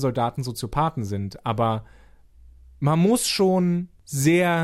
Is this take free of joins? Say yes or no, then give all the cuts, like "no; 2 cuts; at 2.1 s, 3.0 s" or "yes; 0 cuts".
yes; 0 cuts